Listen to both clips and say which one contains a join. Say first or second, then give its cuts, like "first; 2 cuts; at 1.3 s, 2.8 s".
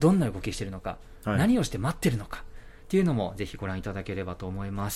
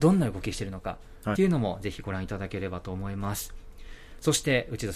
second; 1 cut; at 1.3 s